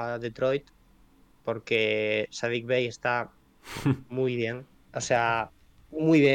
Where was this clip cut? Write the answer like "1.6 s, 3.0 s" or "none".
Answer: 4.9 s